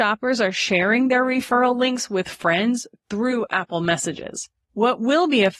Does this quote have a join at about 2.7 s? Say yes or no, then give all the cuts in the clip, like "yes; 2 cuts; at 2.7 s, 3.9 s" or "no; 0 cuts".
no; 1 cut; at 4.6 s